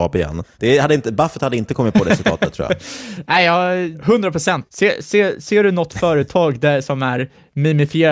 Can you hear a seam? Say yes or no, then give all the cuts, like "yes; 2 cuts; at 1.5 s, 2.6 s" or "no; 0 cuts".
no; 0 cuts